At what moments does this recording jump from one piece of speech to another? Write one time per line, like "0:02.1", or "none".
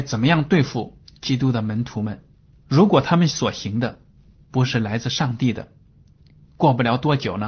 0:02.5